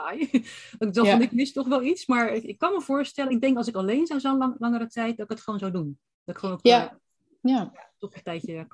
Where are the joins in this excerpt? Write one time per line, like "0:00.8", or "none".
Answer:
none